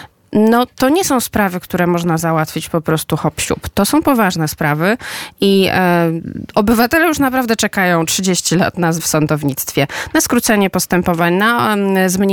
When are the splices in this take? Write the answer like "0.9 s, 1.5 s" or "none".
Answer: 9.0 s